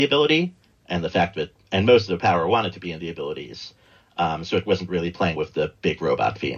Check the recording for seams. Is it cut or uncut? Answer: cut